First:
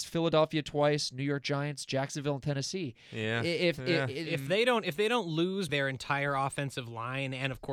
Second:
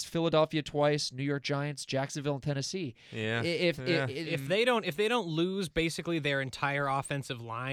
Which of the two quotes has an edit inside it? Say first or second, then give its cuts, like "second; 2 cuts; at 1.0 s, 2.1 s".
first; 1 cut; at 5.7 s